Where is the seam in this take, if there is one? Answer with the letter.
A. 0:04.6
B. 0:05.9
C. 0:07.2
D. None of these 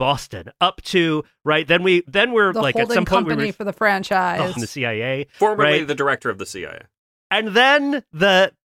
A